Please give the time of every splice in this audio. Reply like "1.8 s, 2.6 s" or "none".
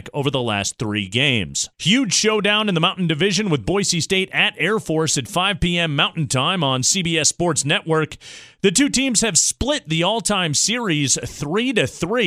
1.7 s